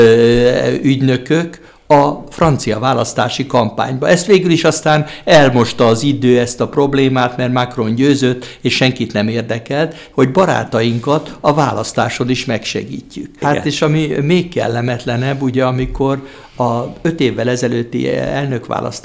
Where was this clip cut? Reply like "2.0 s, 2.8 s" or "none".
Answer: 10.1 s, 13.4 s